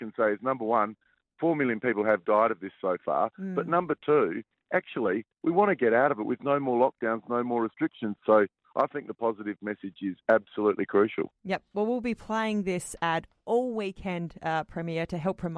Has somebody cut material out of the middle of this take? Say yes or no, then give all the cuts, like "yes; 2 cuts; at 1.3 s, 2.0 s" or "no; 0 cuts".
yes; 1 cut; at 8.2 s